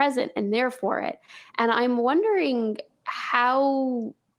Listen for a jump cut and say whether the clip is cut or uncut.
uncut